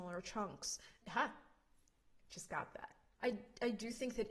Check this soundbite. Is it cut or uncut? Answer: cut